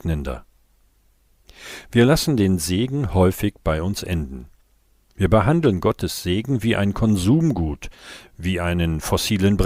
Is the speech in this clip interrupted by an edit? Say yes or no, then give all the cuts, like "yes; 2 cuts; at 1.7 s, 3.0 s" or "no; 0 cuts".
no; 0 cuts